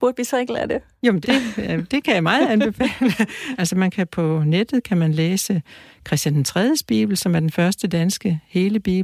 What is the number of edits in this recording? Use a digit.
2